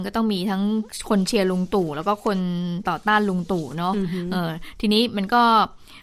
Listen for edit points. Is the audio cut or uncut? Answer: uncut